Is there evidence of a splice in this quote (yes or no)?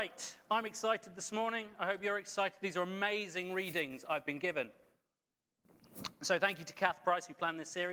no